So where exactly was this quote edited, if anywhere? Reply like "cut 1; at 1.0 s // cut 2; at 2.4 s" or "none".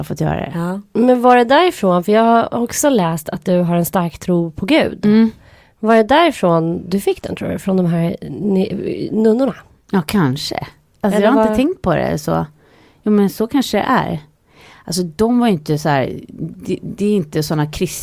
none